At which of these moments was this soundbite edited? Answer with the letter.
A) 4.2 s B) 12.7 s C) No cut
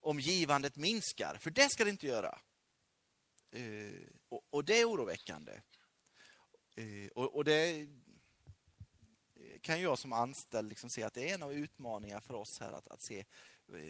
A